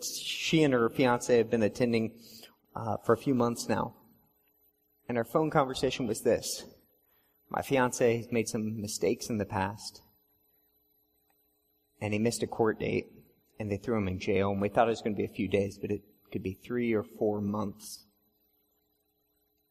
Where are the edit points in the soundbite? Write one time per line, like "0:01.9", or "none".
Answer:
none

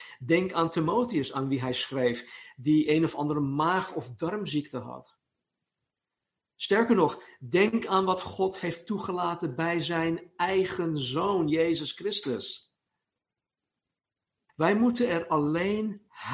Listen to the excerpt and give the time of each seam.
0:14.5

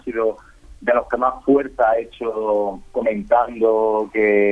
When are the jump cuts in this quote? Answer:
none

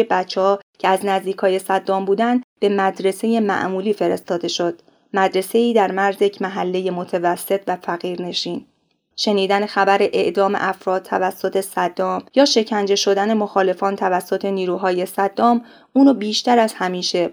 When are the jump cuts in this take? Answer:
0:09.1

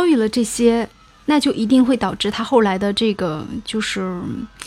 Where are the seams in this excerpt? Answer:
none

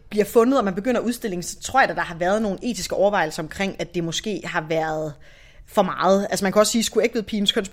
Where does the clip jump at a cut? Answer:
none

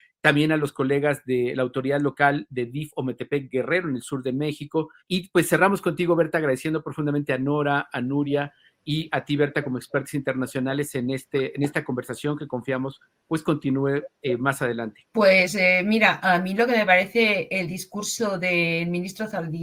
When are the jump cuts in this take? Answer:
0:05.0
0:15.0

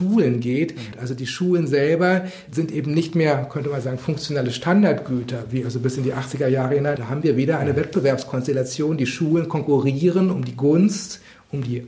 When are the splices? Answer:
0:00.9
0:07.0

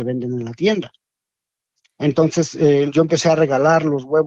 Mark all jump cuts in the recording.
0:02.9

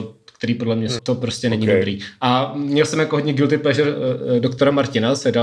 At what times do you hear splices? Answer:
0:01.0

